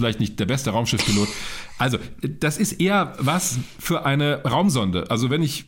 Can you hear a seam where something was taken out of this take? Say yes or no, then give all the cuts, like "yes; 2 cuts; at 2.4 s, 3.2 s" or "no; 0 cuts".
no; 0 cuts